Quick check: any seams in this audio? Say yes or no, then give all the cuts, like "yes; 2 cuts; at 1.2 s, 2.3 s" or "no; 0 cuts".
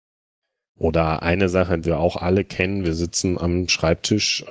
yes; 1 cut; at 1.8 s